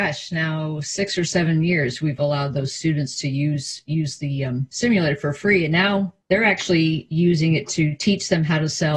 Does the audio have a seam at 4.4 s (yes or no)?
no